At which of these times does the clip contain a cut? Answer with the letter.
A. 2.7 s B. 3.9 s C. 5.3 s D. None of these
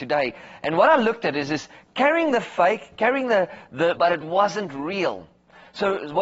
B